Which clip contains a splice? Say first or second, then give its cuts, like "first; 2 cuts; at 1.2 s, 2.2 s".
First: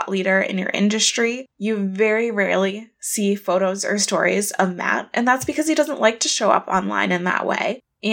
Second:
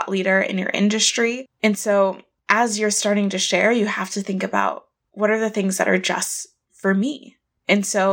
first; 1 cut; at 1.5 s